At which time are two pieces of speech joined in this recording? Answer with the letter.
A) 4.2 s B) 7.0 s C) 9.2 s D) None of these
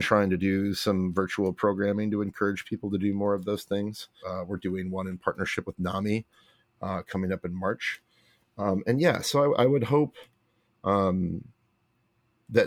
A